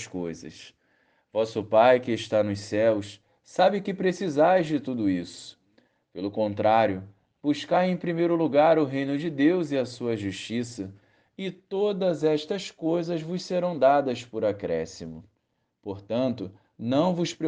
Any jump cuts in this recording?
no; 0 cuts

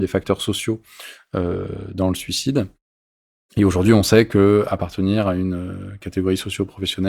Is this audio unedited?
yes; 0 cuts

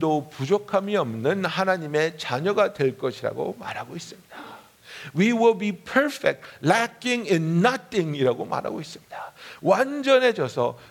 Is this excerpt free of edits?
yes; 0 cuts

